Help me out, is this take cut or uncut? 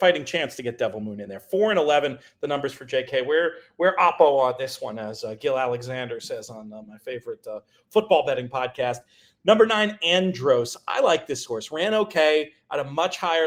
uncut